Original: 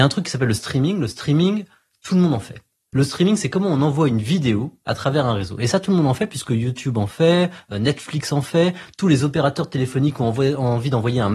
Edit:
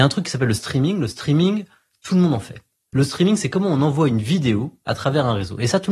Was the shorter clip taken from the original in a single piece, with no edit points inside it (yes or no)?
yes